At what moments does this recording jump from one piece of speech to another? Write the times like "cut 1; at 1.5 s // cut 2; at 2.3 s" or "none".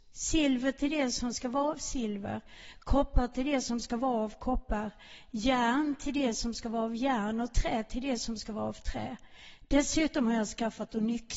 none